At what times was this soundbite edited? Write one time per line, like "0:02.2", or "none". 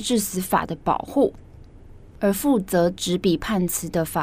none